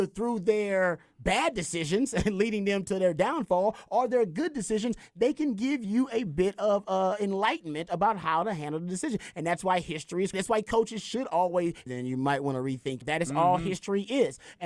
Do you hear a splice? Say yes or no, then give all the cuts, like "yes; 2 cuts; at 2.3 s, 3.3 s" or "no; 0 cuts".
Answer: yes; 3 cuts; at 10.3 s, 11.9 s, 13.0 s